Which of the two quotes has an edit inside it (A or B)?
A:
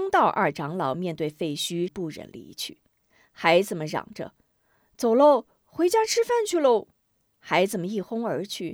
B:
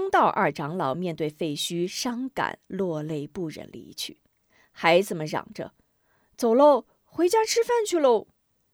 A